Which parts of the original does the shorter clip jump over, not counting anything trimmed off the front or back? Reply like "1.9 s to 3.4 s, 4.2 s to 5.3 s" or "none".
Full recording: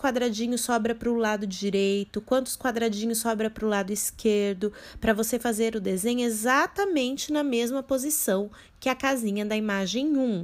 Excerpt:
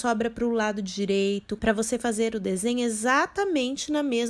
2.2 s to 5.0 s